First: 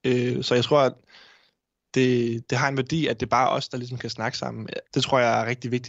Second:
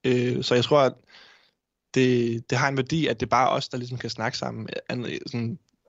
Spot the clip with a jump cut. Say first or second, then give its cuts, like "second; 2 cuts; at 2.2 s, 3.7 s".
first; 1 cut; at 4.8 s